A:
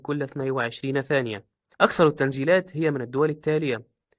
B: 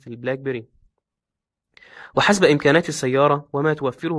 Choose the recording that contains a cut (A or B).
A